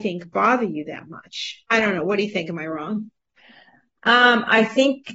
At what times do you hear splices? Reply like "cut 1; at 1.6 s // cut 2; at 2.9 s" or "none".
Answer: cut 1; at 1.7 s

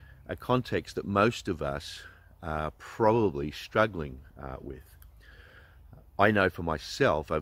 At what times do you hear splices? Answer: none

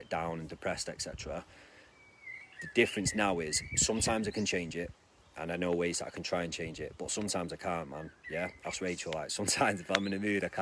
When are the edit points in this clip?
none

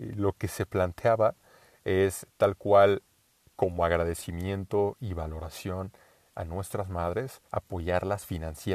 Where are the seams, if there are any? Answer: cut 1; at 7.5 s

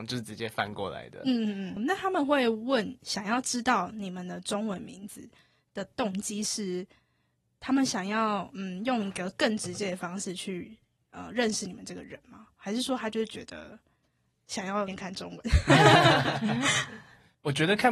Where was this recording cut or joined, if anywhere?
cut 1; at 14.9 s

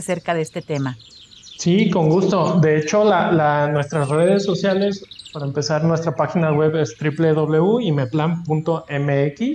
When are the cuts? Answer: none

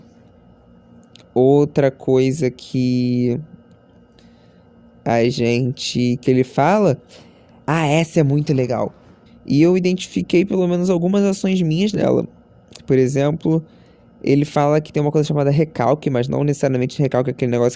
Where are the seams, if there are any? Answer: cut 1; at 9.3 s

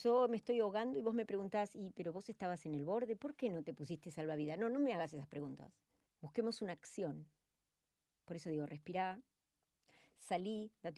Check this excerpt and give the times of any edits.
cut 1; at 6.1 s

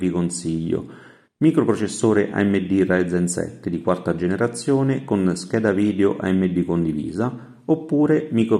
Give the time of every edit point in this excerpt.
none

